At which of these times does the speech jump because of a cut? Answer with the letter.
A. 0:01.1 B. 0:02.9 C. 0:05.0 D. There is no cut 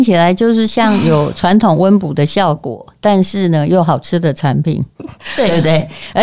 C